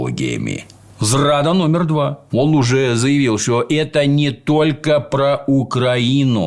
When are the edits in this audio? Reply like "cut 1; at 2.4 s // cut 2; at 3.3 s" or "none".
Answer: cut 1; at 2.3 s